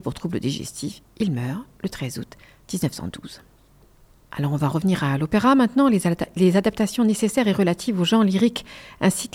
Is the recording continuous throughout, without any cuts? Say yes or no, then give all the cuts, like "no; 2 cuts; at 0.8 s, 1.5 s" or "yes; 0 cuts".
yes; 0 cuts